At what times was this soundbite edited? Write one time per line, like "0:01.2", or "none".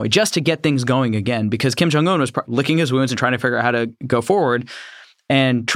0:02.4